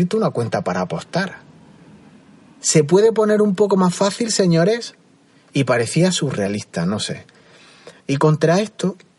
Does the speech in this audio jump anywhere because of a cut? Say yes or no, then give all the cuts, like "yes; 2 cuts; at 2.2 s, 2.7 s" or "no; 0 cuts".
yes; 1 cut; at 8.0 s